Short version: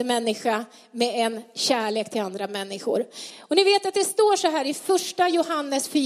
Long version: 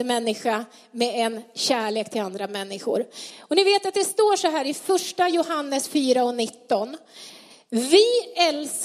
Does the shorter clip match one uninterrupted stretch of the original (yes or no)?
yes